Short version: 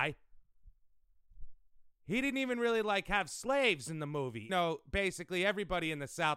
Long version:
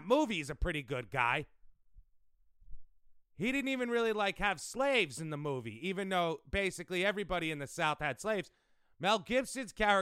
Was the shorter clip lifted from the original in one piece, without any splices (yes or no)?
no